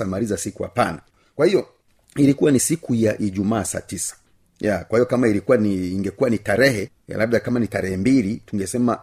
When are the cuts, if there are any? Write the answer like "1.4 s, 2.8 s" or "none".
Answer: none

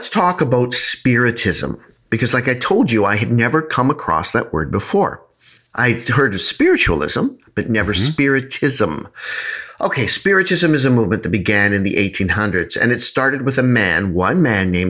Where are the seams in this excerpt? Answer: none

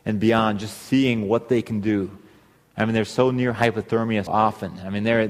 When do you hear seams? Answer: 4.3 s

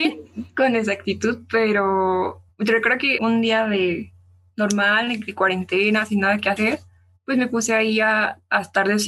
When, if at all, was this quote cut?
3.2 s

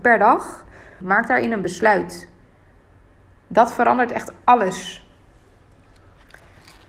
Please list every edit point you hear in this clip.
1.0 s

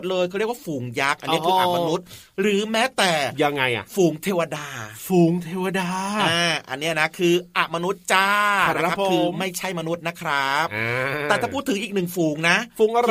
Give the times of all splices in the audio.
none

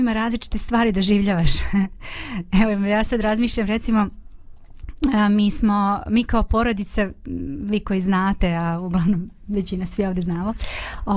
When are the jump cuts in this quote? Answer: none

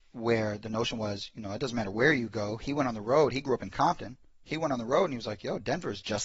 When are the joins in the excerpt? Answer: none

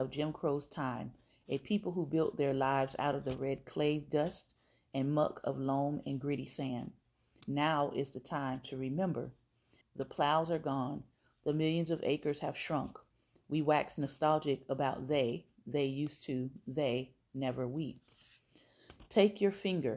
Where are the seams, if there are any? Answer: 7.4 s, 9.8 s

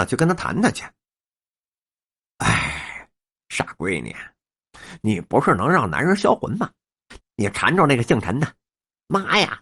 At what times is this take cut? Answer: 7.2 s

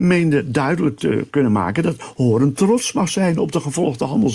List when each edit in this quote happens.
none

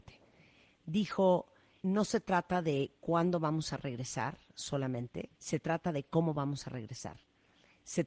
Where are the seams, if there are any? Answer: 1.8 s, 5.4 s

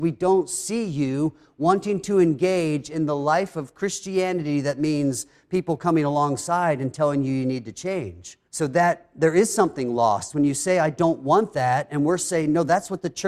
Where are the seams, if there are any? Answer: 8.5 s

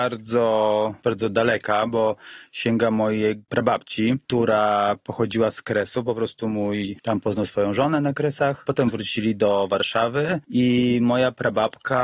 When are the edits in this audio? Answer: 7.0 s

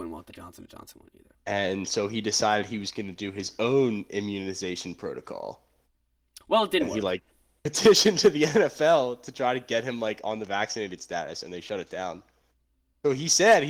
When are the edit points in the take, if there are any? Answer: 1.3 s

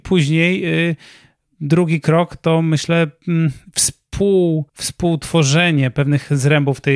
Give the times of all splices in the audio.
4.7 s

